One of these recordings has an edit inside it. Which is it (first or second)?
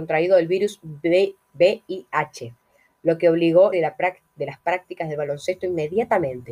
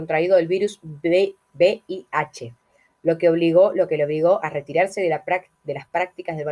first